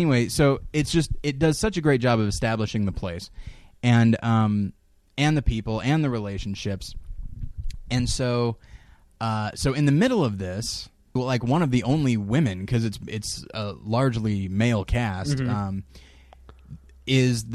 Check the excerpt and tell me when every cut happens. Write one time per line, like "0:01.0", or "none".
0:11.2